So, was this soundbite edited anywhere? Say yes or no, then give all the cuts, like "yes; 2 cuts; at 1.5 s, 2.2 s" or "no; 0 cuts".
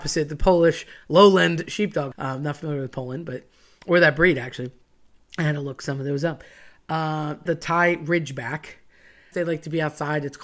yes; 3 cuts; at 2.1 s, 7.5 s, 9.3 s